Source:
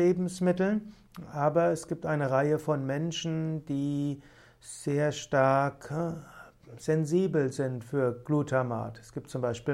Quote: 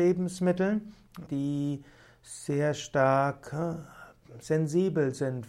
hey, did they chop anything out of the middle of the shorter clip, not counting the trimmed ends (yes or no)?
yes